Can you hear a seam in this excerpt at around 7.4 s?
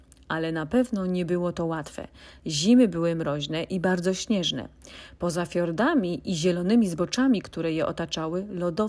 no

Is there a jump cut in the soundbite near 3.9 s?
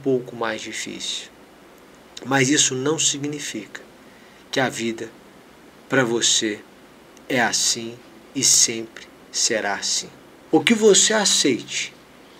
no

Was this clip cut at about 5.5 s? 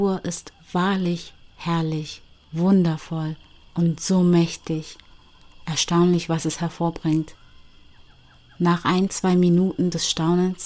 no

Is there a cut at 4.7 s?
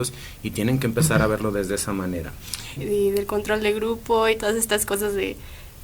no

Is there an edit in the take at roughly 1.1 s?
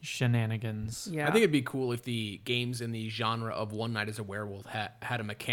no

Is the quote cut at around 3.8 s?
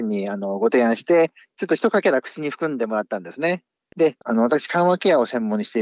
yes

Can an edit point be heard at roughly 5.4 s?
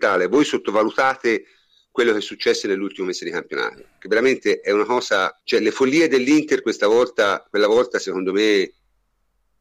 yes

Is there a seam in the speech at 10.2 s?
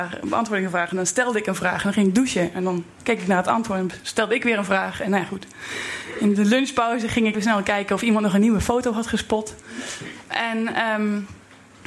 yes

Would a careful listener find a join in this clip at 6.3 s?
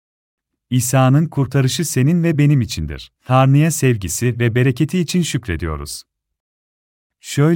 no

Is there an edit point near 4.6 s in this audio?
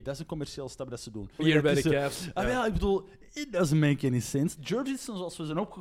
yes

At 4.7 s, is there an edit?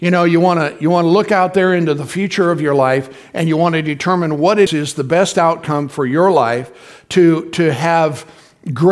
yes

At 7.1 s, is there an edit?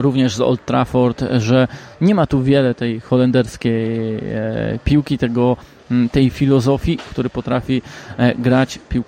yes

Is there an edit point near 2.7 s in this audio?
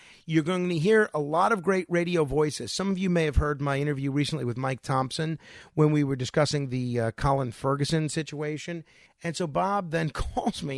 no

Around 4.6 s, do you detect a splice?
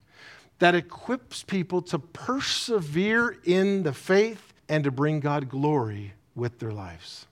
yes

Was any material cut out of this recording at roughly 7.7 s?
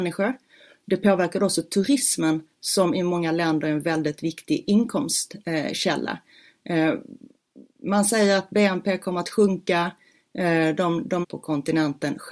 no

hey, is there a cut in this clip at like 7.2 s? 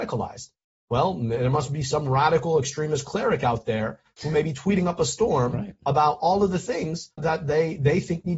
yes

